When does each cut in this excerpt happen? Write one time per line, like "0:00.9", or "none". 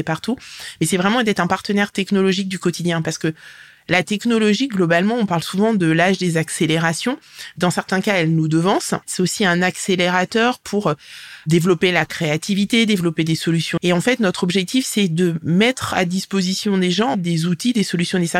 0:09.0
0:13.8